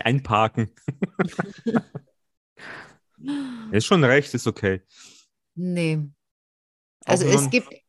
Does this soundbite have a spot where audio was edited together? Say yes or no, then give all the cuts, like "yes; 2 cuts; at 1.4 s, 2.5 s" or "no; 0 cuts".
yes; 1 cut; at 5.4 s